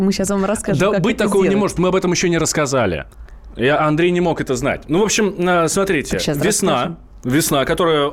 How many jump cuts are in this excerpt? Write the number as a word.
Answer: zero